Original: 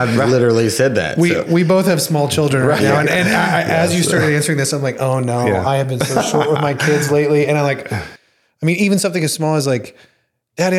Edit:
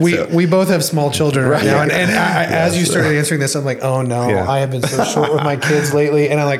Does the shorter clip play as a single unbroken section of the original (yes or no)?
yes